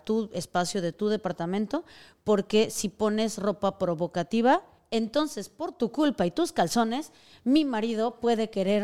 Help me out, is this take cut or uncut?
uncut